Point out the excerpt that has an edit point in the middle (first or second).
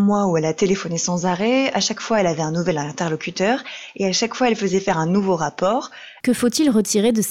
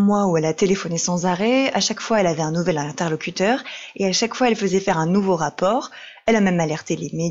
first